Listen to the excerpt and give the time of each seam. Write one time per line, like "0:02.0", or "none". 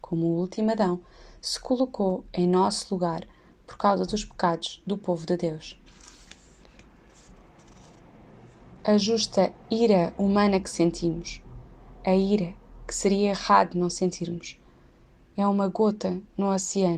none